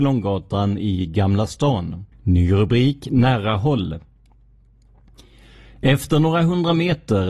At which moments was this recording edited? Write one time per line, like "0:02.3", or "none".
0:02.1